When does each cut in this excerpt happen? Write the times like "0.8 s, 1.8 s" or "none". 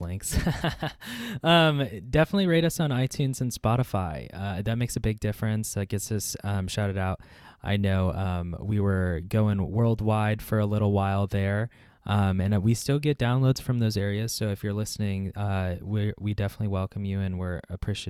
none